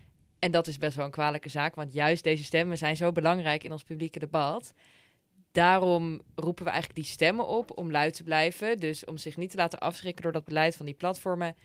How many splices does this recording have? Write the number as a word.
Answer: zero